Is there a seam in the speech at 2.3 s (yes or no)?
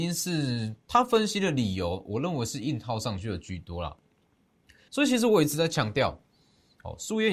no